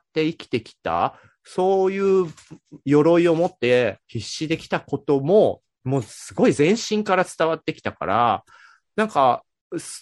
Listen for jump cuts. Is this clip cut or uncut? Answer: uncut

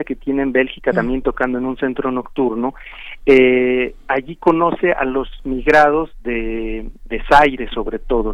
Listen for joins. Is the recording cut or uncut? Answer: uncut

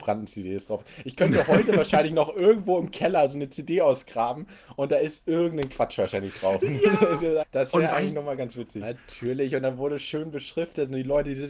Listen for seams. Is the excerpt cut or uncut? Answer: cut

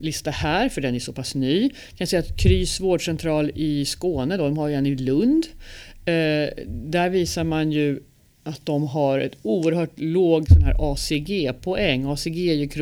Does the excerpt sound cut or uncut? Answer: uncut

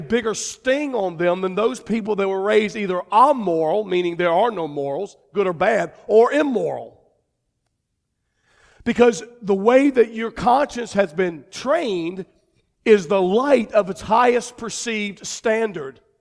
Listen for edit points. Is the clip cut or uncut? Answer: uncut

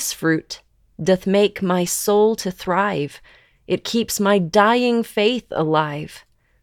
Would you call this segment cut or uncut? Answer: uncut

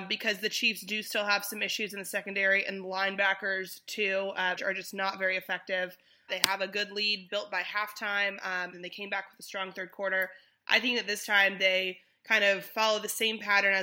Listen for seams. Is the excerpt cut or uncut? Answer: cut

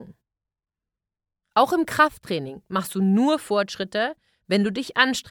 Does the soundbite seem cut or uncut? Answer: uncut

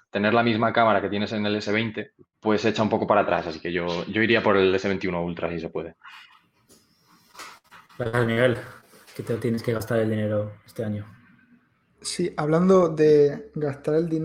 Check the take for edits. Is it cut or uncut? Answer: cut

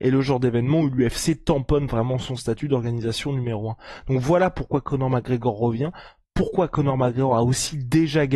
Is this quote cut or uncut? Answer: uncut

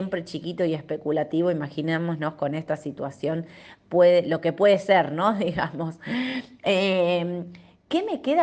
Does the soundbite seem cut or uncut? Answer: uncut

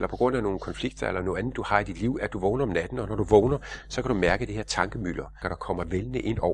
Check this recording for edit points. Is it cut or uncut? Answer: cut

